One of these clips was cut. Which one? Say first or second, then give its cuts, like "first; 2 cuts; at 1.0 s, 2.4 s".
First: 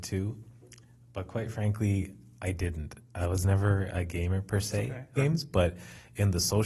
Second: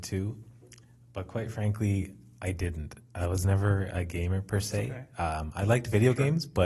first; 1 cut; at 5.2 s